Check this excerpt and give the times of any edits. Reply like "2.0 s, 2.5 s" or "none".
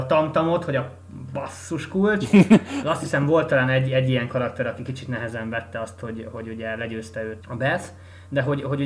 7.4 s